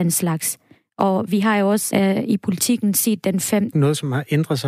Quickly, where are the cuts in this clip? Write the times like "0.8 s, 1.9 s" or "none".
1.9 s, 3.7 s